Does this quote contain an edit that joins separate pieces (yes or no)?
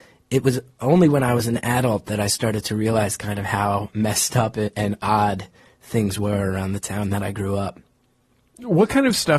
no